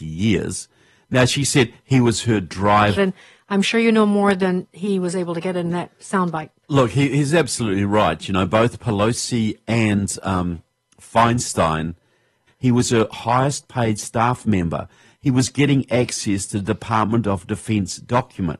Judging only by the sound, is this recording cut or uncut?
cut